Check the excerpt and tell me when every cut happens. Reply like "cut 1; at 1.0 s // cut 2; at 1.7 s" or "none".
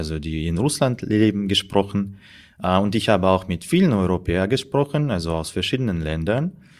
none